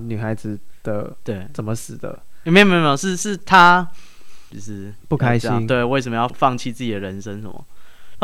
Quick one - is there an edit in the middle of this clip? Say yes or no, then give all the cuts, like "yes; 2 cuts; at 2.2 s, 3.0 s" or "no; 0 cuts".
yes; 2 cuts; at 4.5 s, 6.3 s